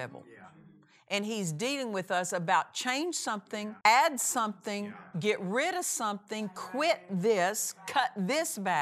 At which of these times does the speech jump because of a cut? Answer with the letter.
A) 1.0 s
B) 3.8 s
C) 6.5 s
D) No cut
B